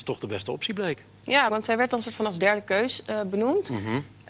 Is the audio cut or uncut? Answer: cut